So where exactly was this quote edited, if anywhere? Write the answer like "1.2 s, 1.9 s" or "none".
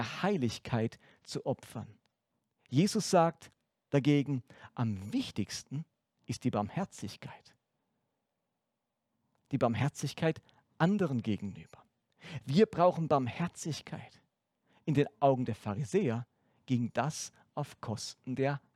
none